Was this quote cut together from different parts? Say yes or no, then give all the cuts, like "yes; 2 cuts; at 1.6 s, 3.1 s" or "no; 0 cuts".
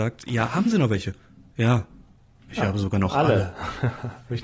no; 0 cuts